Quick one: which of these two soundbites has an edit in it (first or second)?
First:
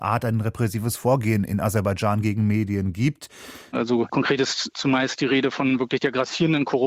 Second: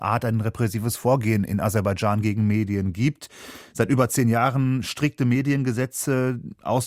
first